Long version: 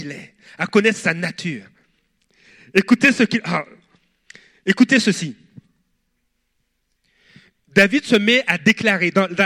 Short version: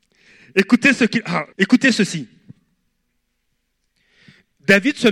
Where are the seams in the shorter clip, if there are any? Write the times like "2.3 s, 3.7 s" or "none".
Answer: 1.5 s